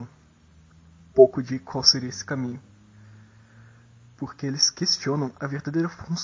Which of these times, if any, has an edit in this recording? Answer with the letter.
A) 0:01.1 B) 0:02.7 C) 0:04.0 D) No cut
A